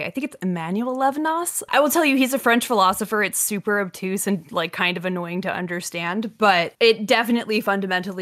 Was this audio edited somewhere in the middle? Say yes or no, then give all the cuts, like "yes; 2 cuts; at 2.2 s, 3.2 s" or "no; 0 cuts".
no; 0 cuts